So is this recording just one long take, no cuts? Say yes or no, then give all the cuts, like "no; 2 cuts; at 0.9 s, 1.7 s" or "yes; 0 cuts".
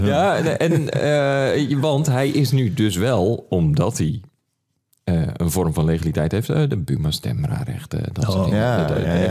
yes; 0 cuts